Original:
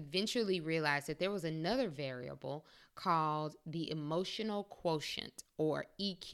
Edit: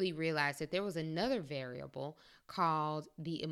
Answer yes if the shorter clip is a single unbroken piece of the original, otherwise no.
yes